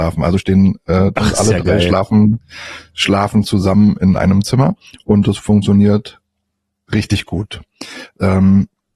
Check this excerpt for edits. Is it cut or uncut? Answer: cut